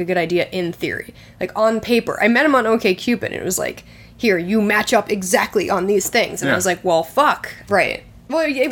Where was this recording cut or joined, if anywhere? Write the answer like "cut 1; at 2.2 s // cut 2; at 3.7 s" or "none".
cut 1; at 7.7 s